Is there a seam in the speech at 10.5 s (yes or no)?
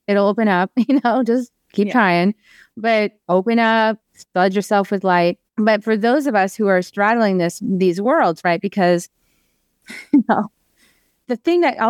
no